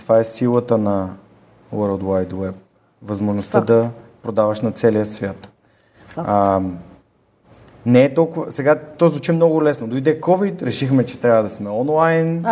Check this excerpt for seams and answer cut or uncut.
uncut